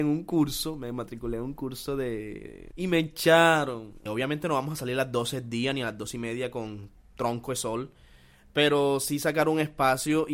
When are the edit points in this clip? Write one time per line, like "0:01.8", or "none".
0:02.7
0:04.1